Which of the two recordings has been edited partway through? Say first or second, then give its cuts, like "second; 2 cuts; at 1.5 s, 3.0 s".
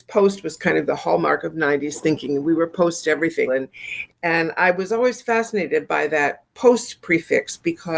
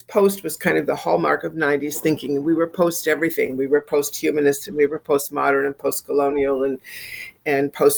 first; 1 cut; at 3.5 s